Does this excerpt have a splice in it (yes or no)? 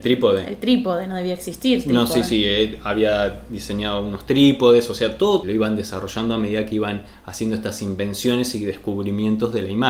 yes